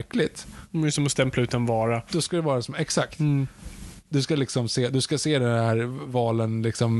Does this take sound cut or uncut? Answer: uncut